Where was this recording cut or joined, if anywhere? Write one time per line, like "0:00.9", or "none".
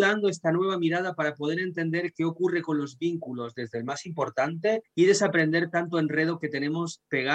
0:04.8